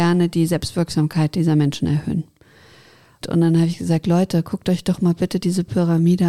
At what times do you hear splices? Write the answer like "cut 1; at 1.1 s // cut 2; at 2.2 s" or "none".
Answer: cut 1; at 3.2 s

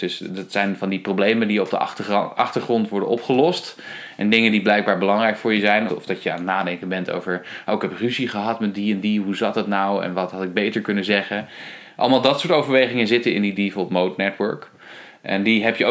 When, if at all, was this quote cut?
cut 1; at 5.9 s

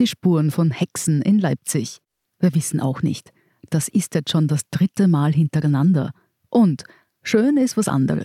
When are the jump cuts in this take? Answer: cut 1; at 2.2 s

